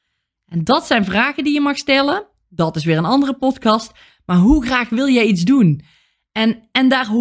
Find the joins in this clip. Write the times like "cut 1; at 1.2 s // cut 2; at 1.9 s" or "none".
none